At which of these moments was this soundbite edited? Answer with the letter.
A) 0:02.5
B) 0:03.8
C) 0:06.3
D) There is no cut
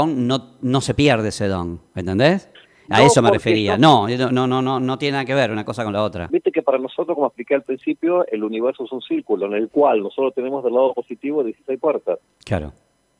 C